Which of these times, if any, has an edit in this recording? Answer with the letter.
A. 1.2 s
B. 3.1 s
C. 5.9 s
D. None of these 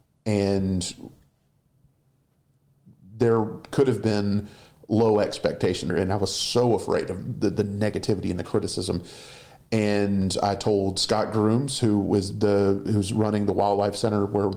C